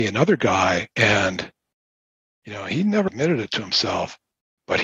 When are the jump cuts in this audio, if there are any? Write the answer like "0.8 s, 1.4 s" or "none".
0.9 s, 3.1 s

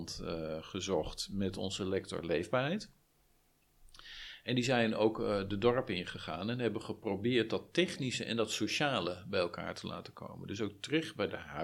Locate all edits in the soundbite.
none

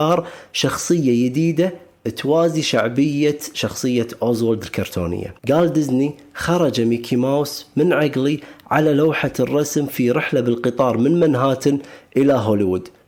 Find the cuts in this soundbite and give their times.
5.4 s

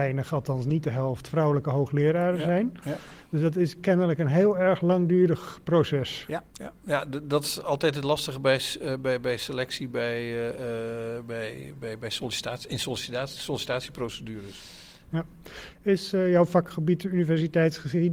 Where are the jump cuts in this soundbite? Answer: 6.5 s, 15.1 s

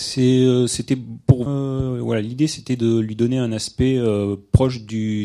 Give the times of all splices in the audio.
1.5 s

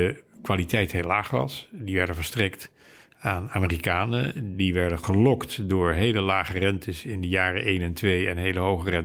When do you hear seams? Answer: none

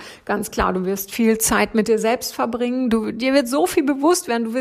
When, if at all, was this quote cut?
none

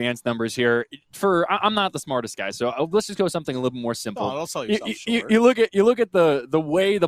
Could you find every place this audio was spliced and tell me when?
none

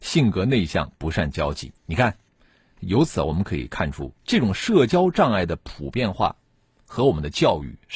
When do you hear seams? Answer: 1.8 s, 4.2 s

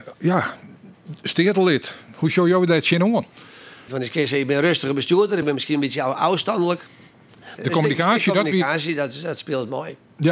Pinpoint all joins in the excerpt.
3.9 s, 5.4 s, 7.6 s

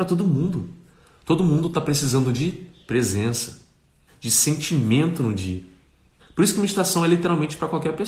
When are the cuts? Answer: 4.1 s, 6.2 s

